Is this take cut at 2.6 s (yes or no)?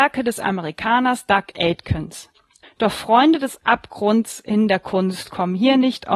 yes